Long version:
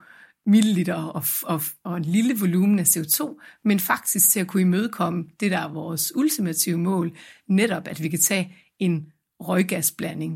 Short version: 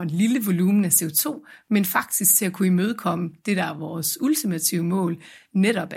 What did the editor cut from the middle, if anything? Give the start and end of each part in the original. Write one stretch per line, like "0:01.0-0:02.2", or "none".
none